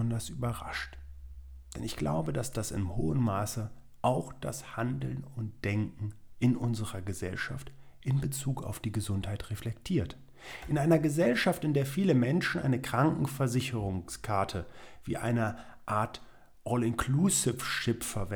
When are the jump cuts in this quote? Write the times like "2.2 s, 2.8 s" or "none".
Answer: none

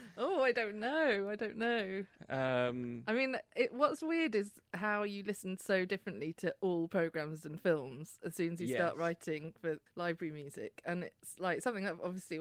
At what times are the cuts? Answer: 9.9 s

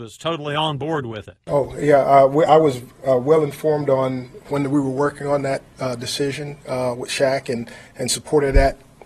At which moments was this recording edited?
none

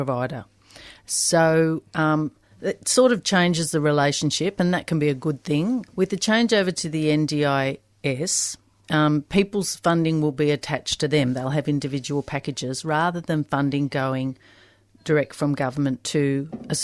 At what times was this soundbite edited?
5.9 s

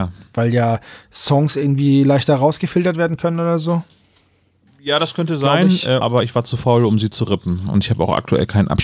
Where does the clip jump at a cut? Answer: 6.0 s

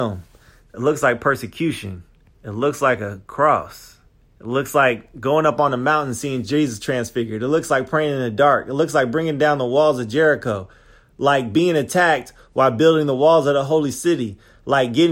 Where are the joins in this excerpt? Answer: none

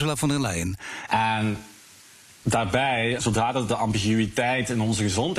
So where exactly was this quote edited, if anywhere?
1.1 s, 3.2 s

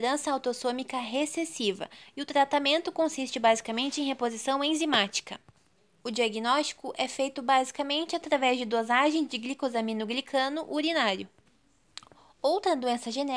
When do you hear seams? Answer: none

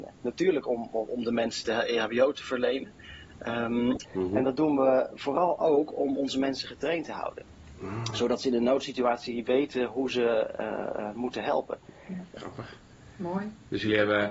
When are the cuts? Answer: 4.0 s, 12.4 s

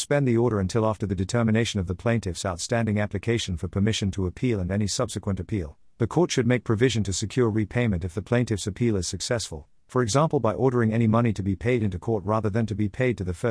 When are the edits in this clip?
none

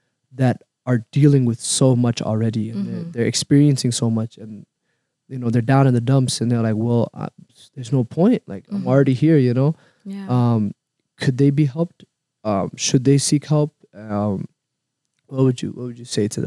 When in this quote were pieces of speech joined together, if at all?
none

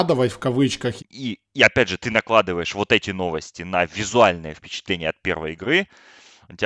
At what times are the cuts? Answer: 1.0 s

